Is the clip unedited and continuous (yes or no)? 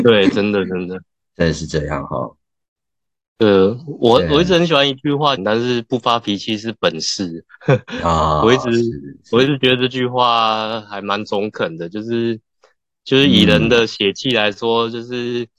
no